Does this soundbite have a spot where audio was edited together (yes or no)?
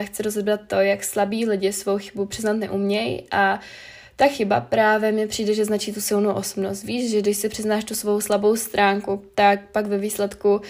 no